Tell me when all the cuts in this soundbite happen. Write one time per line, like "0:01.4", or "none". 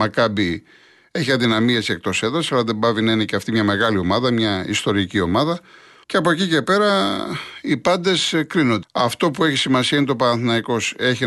0:06.0
0:08.8